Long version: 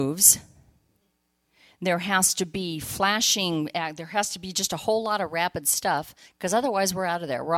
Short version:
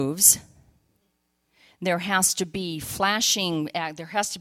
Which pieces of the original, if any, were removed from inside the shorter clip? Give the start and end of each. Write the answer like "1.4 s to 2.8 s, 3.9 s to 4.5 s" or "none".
none